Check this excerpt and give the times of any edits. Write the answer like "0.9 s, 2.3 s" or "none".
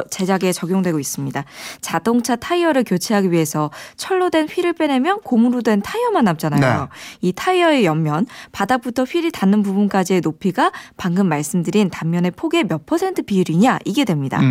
1.8 s